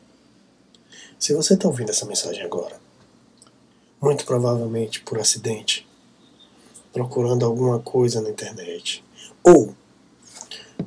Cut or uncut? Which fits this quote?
cut